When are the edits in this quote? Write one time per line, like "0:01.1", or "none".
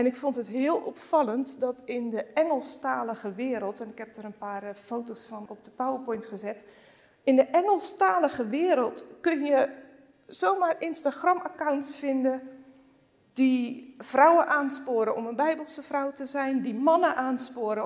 0:05.5